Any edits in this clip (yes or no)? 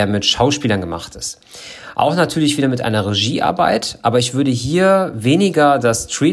no